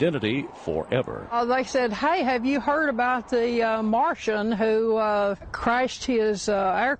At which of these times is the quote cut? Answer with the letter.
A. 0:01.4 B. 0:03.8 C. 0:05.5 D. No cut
D